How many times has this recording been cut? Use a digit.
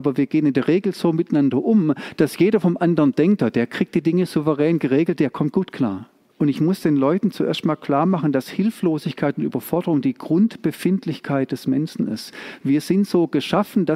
1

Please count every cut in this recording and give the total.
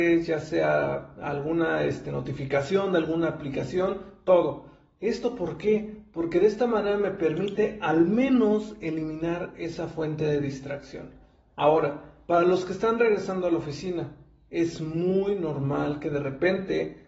0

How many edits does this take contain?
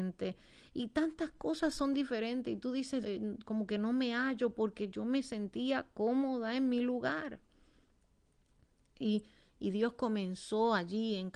1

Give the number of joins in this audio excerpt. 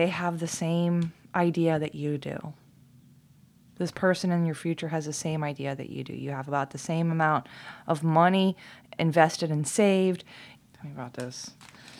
2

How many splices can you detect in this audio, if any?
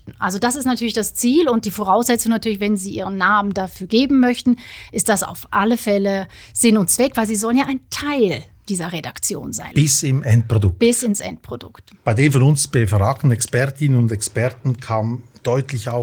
1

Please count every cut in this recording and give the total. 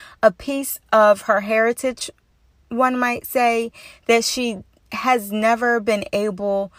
0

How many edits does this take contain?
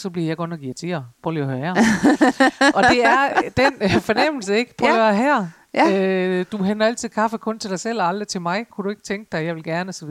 0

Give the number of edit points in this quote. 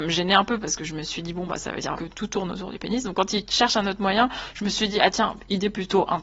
1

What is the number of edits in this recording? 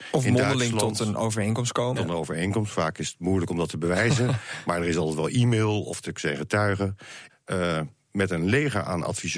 2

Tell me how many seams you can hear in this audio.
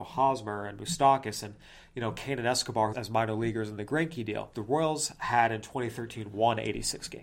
2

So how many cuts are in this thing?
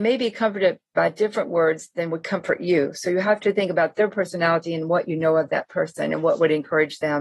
0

